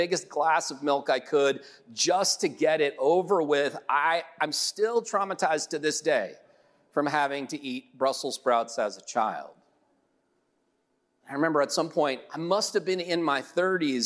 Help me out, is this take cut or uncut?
uncut